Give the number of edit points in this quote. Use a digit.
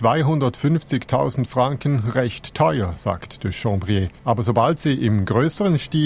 1